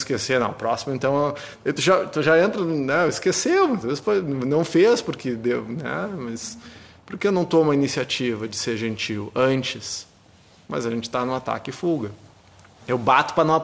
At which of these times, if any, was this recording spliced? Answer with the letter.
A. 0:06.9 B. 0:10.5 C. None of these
C